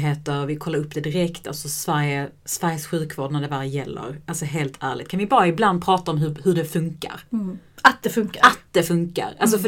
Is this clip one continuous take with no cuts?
yes; 0 cuts

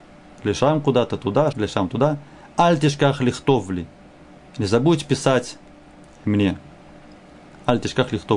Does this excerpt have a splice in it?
yes; 1 cut; at 1.5 s

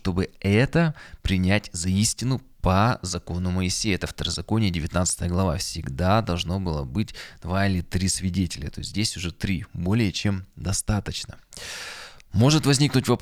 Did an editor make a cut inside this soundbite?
no; 0 cuts

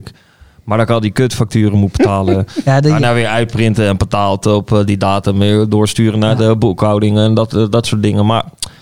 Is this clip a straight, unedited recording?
yes; 0 cuts

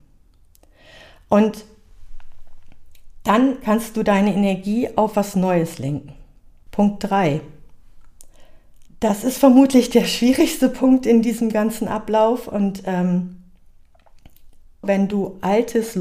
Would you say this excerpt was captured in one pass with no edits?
no; 3 cuts; at 6.7 s, 8.9 s, 14.8 s

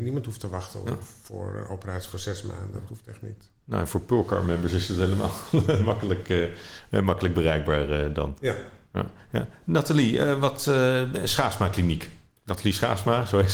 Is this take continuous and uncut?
yes; 0 cuts

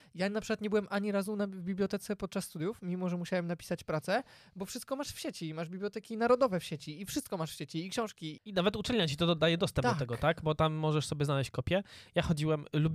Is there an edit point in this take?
yes; 1 cut; at 8.4 s

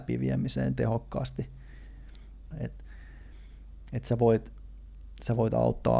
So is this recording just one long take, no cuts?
no; 1 cut; at 2.5 s

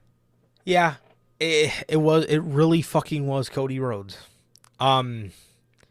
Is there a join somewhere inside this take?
no; 0 cuts

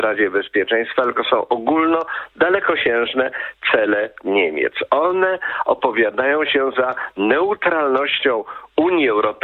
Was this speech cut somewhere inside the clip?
no; 0 cuts

